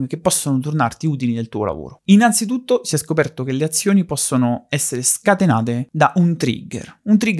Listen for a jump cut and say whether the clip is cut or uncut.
uncut